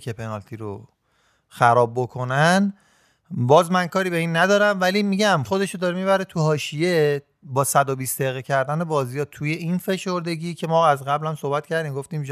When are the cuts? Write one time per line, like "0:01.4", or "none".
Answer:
0:05.5